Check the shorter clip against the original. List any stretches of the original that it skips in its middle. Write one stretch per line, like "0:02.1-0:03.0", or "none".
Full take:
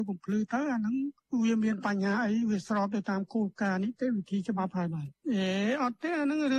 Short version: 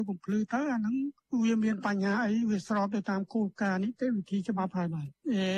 none